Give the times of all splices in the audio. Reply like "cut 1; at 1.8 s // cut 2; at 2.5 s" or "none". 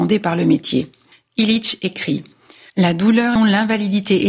cut 1; at 3.4 s

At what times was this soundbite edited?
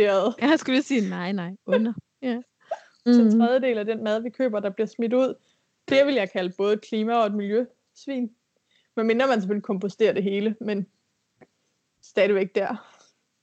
cut 1; at 3.1 s

